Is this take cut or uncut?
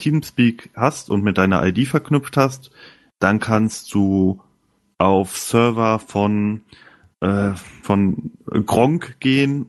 cut